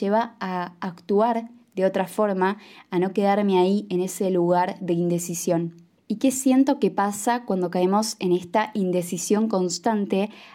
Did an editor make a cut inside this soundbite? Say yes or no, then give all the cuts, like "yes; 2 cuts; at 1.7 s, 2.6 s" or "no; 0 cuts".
yes; 1 cut; at 6.0 s